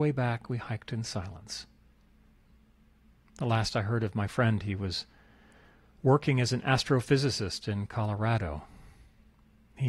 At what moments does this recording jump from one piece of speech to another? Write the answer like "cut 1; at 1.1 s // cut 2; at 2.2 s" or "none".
none